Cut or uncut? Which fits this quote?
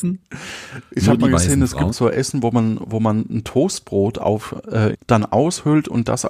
cut